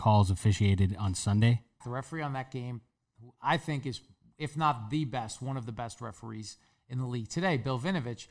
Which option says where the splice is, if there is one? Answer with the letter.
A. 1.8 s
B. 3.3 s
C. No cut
A